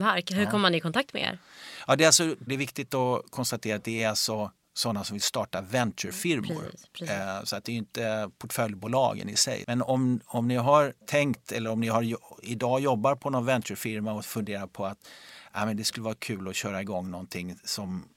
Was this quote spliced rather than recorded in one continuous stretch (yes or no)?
yes